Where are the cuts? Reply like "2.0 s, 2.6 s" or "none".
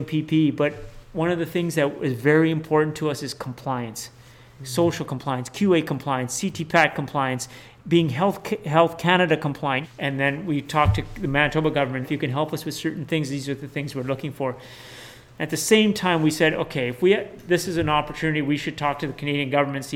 9.8 s, 12.0 s, 15.3 s